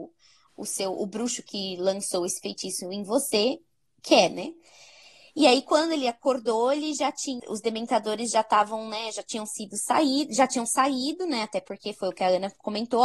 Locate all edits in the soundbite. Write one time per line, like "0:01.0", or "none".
0:07.4